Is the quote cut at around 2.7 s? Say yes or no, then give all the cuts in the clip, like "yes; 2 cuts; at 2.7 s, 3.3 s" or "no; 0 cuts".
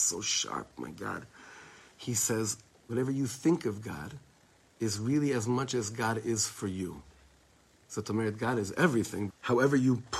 yes; 2 cuts; at 2.7 s, 9.3 s